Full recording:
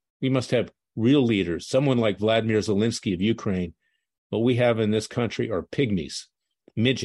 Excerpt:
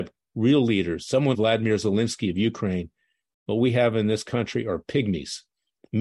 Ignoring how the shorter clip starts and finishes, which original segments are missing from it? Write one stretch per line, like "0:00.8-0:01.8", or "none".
0:01.9-0:02.2